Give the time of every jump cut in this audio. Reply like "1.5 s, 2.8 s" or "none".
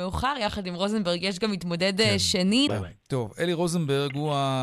2.7 s